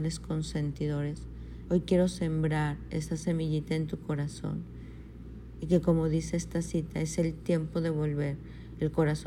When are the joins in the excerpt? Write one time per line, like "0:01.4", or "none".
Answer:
0:01.7